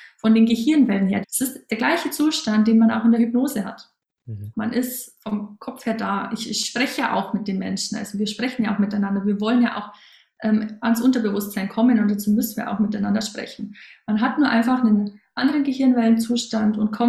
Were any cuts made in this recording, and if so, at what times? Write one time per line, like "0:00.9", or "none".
0:01.2
0:04.5